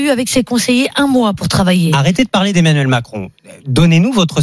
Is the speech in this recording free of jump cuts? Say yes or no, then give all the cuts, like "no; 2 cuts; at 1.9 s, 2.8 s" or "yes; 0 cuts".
yes; 0 cuts